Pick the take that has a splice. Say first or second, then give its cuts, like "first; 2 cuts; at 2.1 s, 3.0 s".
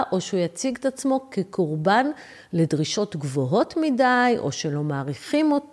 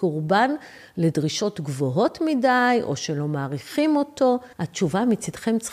second; 1 cut; at 4.5 s